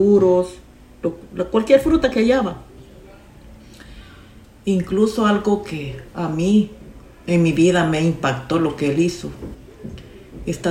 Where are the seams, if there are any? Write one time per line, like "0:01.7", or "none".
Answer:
none